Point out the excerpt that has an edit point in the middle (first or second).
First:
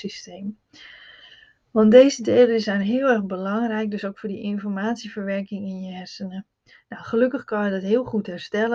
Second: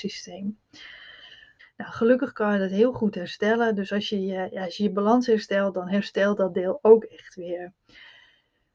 second